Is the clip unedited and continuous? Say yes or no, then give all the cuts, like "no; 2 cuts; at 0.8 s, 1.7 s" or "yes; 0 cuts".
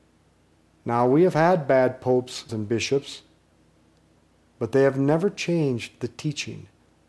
no; 1 cut; at 2.5 s